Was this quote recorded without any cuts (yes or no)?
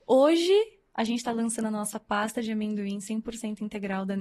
yes